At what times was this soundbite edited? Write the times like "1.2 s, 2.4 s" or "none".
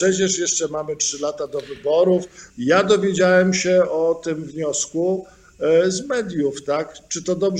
2.5 s